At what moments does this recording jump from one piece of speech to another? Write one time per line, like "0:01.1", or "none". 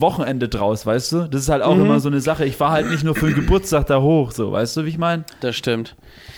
none